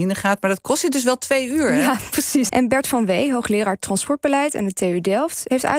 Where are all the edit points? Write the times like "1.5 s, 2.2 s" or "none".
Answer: 2.5 s

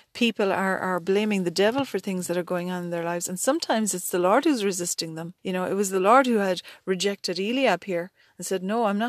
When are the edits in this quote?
5.4 s

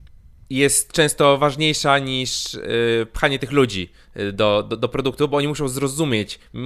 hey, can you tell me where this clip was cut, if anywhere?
none

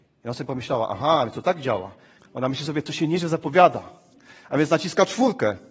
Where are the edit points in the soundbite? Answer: 2.2 s

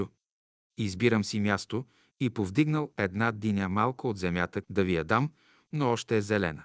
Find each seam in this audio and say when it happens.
4.6 s

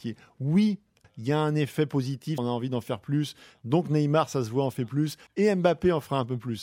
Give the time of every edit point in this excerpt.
1.0 s, 2.4 s, 5.3 s

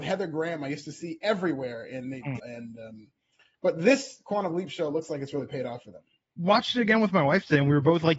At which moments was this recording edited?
2.4 s

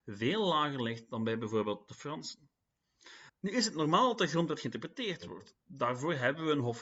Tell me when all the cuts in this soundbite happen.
3.3 s

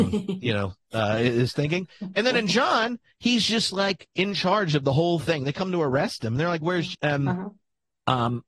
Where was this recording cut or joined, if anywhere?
6.9 s

